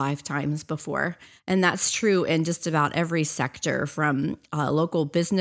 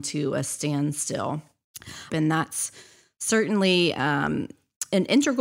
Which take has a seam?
second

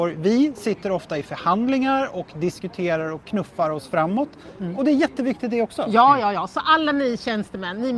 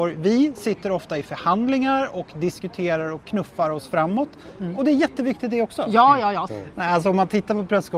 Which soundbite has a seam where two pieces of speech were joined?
second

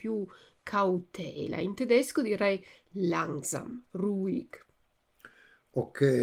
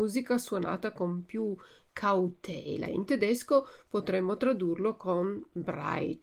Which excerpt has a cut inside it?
second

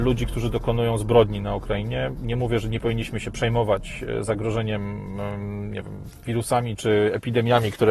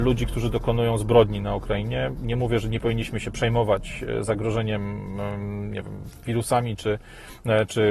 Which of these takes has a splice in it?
first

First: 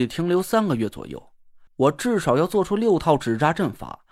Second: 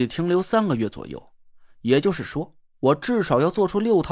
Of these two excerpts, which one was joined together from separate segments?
first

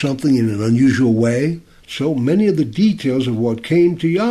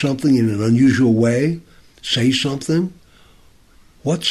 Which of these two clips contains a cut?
first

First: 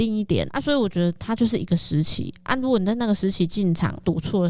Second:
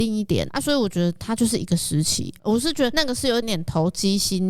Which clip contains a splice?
second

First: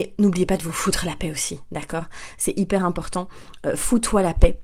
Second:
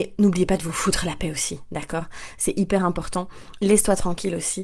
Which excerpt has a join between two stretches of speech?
second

